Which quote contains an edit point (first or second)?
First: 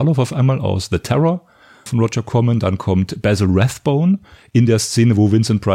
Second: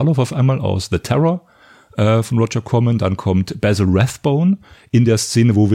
first